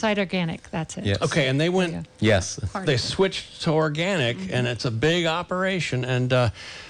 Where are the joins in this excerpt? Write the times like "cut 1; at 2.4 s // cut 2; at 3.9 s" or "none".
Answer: cut 1; at 2.1 s

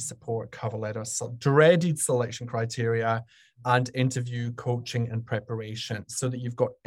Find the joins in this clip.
none

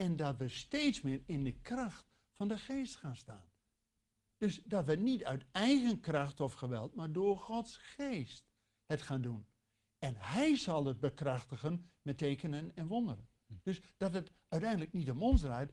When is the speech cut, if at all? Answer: none

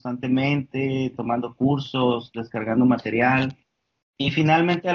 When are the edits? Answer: cut 1; at 4.0 s

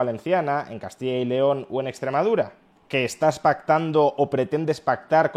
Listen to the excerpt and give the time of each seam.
none

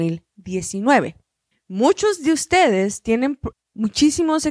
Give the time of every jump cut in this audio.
cut 1; at 1.5 s // cut 2; at 3.5 s

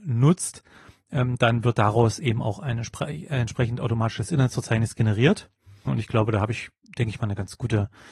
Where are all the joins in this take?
cut 1; at 5.9 s

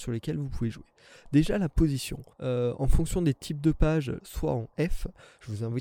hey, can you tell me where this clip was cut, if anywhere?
cut 1; at 2.3 s // cut 2; at 4.2 s

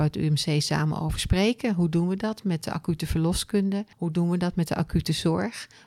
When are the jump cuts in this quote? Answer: cut 1; at 3.9 s

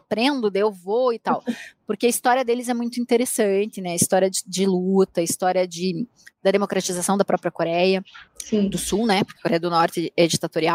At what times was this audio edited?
cut 1; at 8.3 s

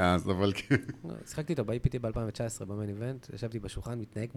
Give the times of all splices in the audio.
none

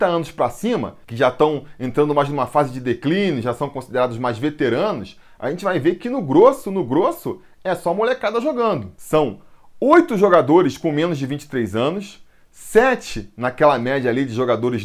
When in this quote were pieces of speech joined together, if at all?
none

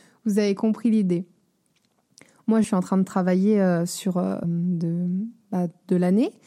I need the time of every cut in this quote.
cut 1; at 2.6 s // cut 2; at 4.4 s

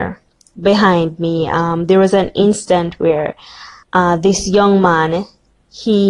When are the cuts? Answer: cut 1; at 3.8 s

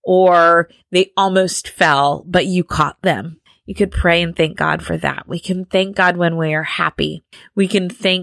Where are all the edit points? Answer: none

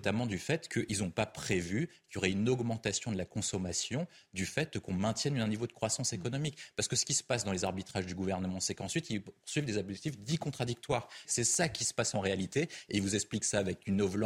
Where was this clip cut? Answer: cut 1; at 11.2 s

